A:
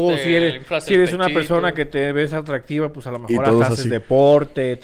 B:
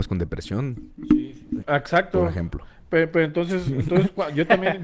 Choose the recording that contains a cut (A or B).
B